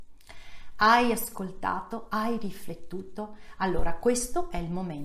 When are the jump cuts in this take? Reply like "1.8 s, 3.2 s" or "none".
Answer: none

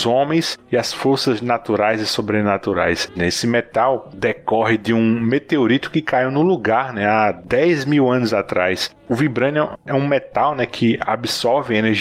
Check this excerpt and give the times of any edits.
3.2 s

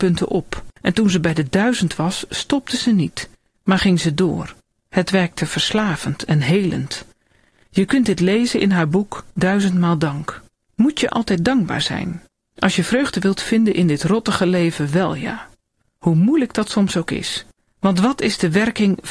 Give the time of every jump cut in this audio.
none

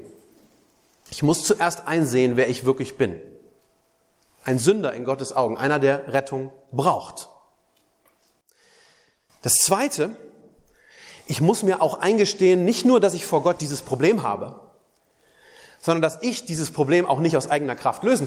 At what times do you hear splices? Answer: none

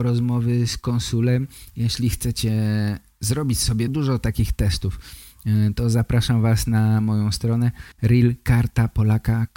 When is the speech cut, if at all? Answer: 3.9 s, 7.9 s

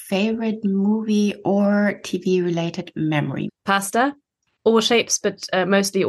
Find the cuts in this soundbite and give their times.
3.5 s

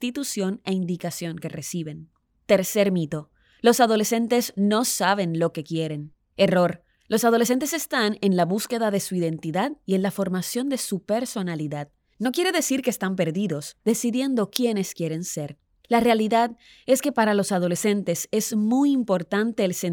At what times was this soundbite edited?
13.8 s

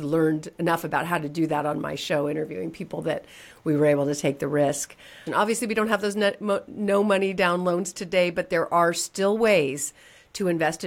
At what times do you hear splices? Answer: 5.3 s

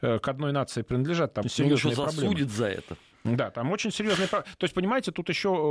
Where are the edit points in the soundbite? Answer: 1.4 s

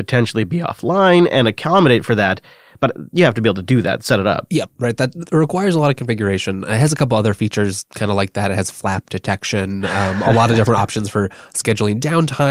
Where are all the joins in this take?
none

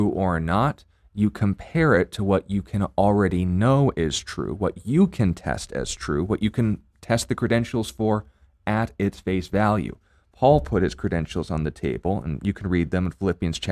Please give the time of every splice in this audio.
none

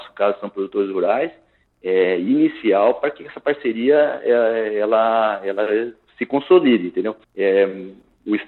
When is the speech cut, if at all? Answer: 7.2 s

